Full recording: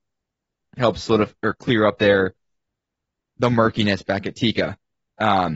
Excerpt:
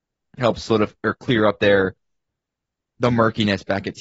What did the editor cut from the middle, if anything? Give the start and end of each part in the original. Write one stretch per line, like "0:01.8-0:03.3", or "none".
none

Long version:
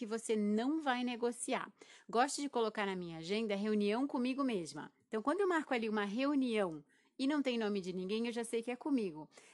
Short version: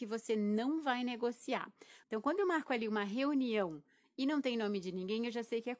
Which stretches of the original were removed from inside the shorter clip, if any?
0:02.0-0:05.0

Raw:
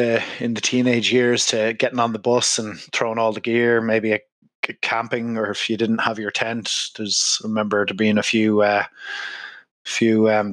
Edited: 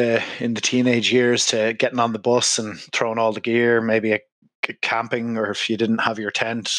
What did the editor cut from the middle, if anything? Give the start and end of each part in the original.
none

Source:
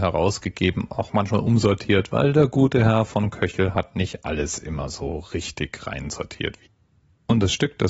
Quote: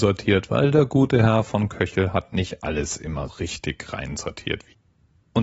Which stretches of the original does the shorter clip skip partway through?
0:04.9-0:05.2

